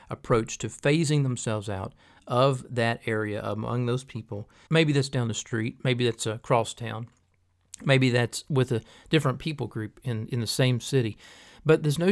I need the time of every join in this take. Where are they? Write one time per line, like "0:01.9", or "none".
0:04.7